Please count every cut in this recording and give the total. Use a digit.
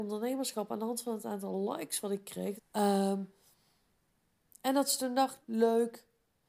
2